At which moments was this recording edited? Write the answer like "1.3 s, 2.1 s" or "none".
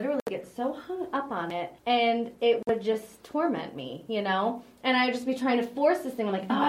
1.8 s